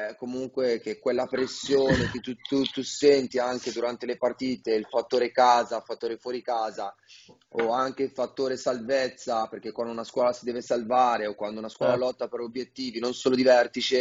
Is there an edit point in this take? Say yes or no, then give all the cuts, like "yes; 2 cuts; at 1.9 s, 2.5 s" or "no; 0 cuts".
no; 0 cuts